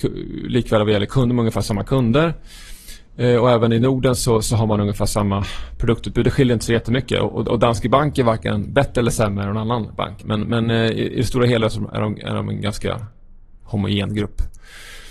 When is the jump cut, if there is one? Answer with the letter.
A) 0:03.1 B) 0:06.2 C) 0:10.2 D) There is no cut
C